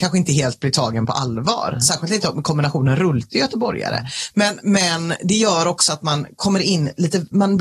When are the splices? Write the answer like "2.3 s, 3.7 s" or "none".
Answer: none